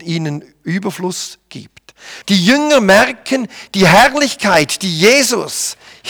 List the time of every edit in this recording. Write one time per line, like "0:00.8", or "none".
0:02.2